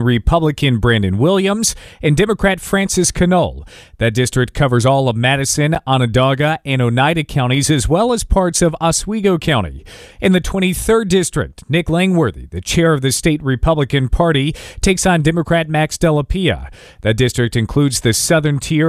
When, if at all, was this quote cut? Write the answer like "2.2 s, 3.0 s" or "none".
none